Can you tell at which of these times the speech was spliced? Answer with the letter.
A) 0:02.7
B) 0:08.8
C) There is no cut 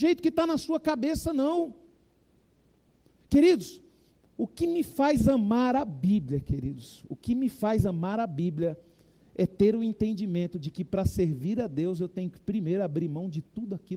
C